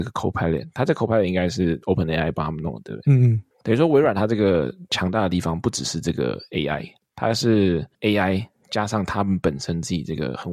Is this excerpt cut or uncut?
cut